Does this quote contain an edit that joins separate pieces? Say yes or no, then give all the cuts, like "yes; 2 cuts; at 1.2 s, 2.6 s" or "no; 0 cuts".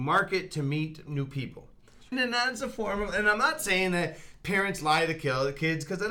yes; 1 cut; at 2.1 s